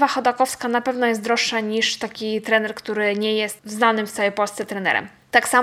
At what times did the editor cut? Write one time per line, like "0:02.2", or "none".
0:03.6